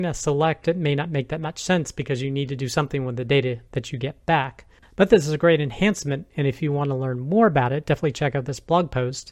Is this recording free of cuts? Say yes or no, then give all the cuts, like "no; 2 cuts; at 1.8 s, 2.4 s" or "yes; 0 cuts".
no; 1 cut; at 4.8 s